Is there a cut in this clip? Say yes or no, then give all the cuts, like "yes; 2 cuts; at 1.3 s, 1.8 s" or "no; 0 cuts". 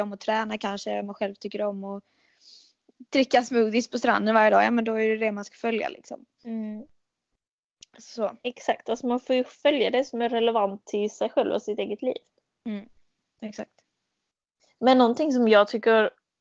no; 0 cuts